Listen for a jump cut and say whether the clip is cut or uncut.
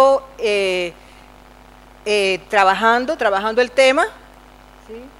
uncut